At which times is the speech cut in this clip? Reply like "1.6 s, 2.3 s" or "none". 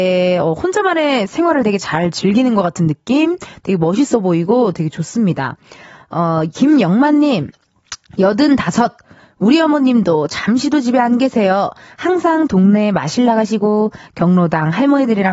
none